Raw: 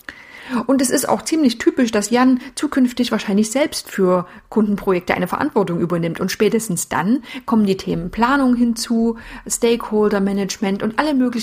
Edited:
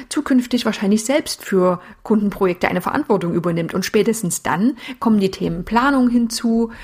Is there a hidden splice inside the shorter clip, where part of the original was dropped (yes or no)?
no